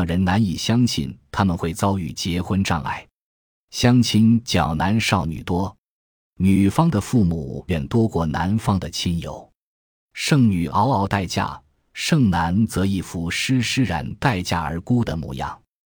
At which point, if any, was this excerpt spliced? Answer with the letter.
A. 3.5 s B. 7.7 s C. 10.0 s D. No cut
B